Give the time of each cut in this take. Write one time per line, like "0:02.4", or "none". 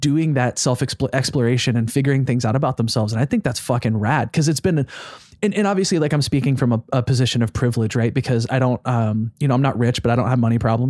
none